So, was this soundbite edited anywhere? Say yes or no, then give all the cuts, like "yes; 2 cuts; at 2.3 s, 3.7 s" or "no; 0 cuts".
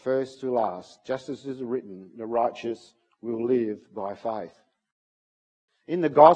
no; 0 cuts